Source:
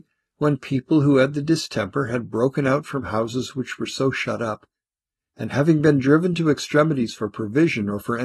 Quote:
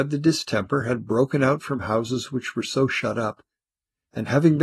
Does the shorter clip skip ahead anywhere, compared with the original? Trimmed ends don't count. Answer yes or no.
no